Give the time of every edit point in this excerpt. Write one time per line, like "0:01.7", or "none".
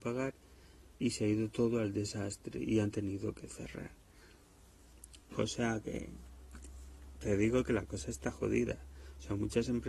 none